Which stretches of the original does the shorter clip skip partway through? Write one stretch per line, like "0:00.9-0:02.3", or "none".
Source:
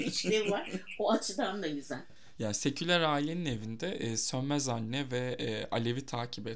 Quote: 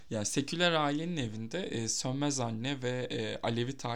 none